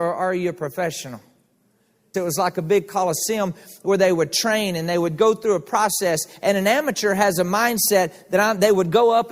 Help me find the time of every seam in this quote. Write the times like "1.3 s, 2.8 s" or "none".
2.1 s